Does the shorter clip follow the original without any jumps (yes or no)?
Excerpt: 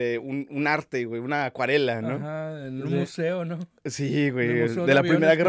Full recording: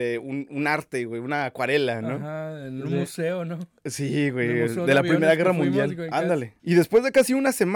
yes